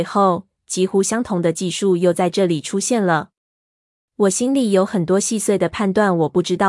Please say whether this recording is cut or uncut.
uncut